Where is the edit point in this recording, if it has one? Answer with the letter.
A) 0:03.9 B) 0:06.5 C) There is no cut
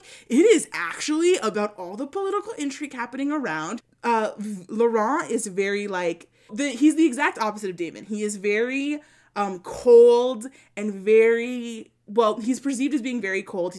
B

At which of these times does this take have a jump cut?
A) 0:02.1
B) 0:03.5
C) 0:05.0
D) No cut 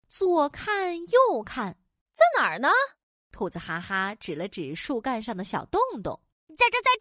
A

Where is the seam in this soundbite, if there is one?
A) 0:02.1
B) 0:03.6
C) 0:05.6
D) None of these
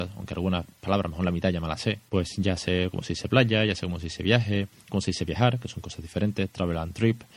A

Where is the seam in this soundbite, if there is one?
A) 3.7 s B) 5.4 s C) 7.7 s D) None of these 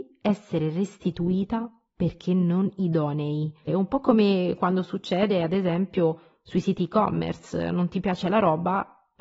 A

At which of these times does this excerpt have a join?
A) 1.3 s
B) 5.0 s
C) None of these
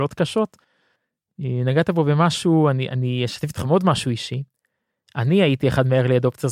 C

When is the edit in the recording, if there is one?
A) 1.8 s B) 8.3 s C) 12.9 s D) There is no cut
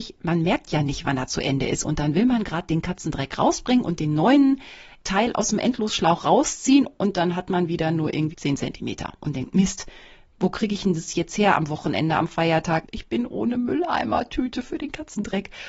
B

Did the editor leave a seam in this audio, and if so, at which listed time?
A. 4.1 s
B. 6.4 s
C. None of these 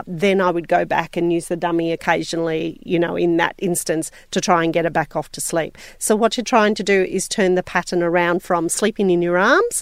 B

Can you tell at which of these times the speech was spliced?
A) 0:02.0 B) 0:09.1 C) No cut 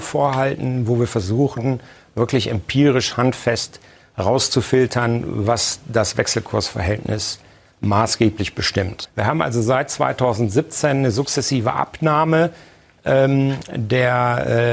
B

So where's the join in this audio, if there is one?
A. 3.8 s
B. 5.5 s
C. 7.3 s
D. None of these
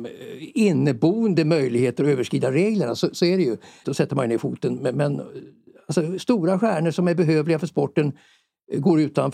A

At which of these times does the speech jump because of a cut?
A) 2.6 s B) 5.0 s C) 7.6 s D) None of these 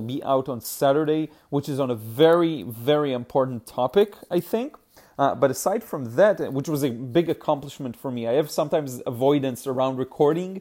D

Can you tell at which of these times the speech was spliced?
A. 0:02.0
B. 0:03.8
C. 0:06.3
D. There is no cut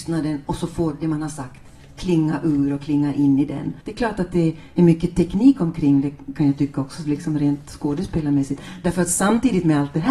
B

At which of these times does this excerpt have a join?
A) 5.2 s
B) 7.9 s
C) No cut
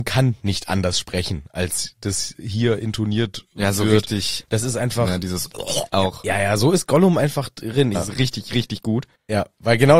B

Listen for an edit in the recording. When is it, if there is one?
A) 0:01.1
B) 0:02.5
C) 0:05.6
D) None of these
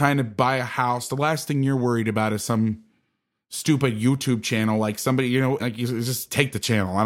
C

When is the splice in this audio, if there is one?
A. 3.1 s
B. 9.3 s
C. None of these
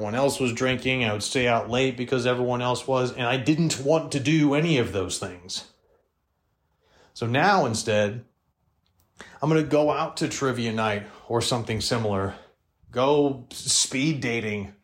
C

